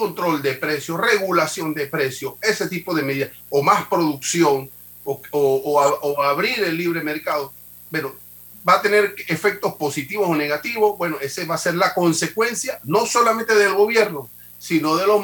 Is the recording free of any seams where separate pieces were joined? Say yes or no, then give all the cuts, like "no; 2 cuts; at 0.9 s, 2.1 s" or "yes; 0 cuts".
yes; 0 cuts